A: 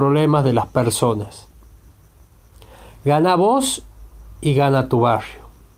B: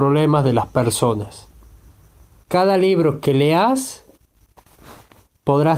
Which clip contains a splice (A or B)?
B